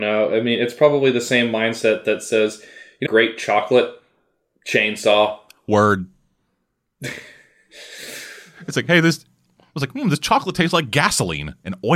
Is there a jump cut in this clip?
yes; 1 cut; at 3.1 s

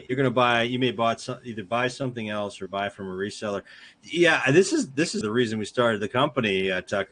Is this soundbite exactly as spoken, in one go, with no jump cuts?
no; 1 cut; at 5.2 s

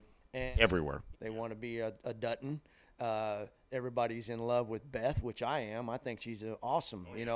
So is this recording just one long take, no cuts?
no; 1 cut; at 1.1 s

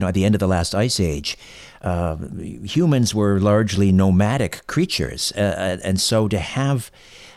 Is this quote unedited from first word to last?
yes; 0 cuts

